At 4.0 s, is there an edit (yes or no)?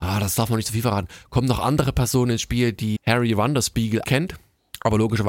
yes